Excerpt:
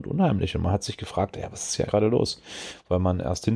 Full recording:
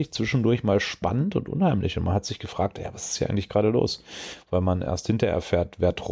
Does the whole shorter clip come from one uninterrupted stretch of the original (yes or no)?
no